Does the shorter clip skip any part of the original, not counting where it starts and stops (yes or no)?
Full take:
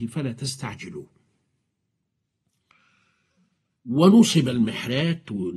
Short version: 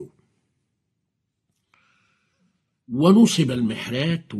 no